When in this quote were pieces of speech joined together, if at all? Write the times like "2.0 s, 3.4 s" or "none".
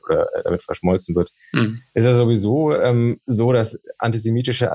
none